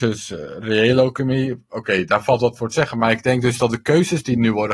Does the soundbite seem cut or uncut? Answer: uncut